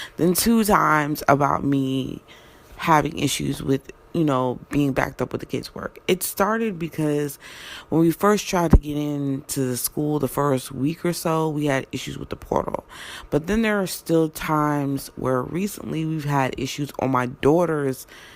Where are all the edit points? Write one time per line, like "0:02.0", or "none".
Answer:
none